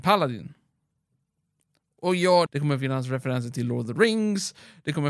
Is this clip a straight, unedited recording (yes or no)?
no